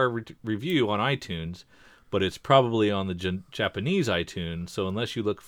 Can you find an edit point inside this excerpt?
no; 0 cuts

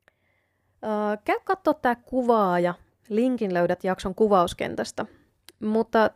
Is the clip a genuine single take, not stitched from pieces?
yes; 0 cuts

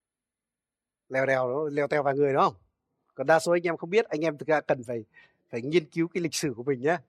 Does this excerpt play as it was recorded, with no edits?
yes; 0 cuts

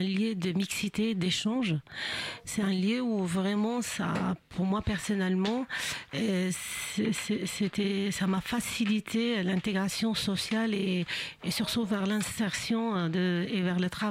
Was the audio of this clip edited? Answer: no; 0 cuts

